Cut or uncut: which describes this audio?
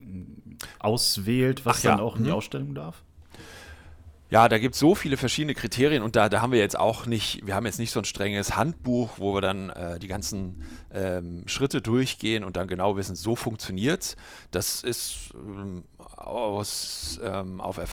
uncut